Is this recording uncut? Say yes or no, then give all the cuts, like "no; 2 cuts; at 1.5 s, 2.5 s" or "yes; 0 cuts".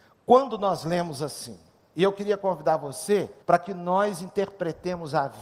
no; 1 cut; at 3.4 s